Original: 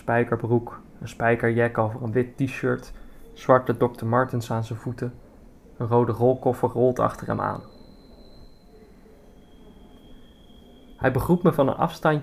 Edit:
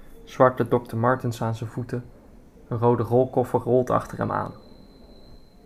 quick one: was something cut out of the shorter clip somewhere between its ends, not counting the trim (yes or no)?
no